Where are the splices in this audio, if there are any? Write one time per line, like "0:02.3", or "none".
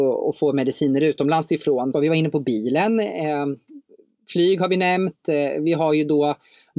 0:01.9